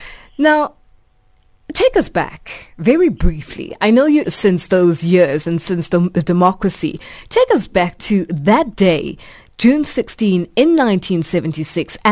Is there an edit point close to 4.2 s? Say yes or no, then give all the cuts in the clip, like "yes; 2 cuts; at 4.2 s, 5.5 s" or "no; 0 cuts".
yes; 1 cut; at 4.2 s